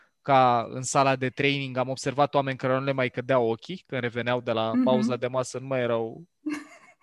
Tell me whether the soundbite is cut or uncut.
uncut